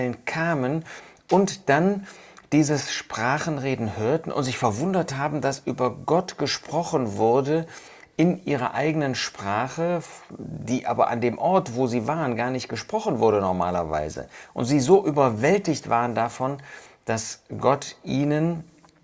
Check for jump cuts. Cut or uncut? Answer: uncut